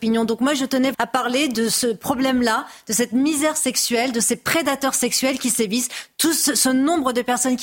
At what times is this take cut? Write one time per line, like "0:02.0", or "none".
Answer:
0:00.9